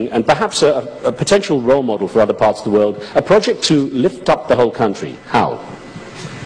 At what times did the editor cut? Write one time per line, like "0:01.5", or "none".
none

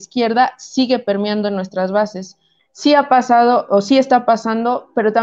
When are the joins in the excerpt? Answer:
0:02.6

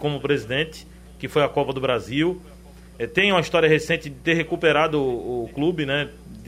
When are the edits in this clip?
none

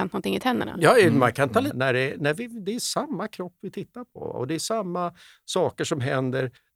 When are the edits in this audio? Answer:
0:01.7

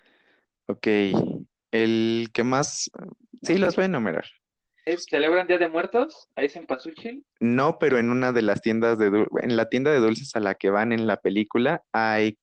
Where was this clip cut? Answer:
0:04.9
0:07.3

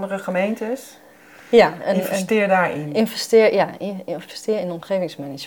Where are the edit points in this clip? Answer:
none

